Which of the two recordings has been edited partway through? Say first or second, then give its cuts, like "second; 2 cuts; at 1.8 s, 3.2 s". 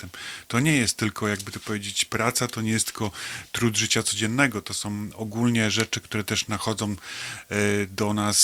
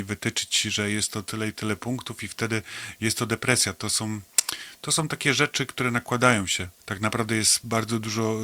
second; 1 cut; at 6.8 s